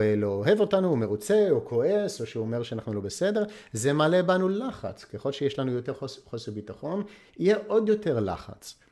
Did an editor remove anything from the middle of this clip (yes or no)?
no